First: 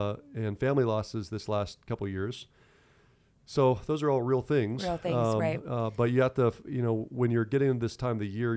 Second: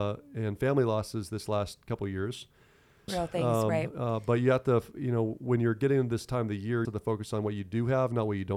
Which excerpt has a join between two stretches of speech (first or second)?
second